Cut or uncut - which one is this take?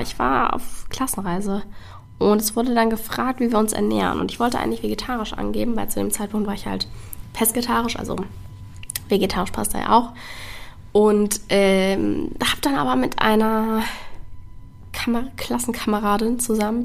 uncut